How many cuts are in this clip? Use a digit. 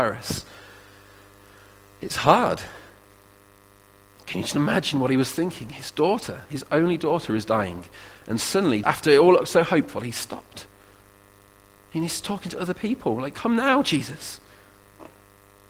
1